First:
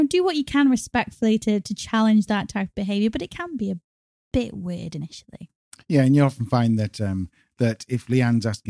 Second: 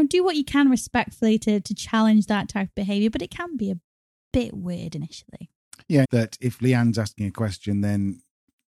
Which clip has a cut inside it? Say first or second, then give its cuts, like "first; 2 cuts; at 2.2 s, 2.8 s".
second; 1 cut; at 6.0 s